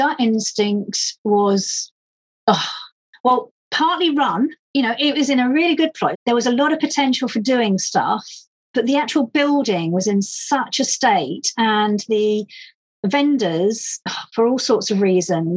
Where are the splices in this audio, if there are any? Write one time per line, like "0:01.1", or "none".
0:04.7
0:06.1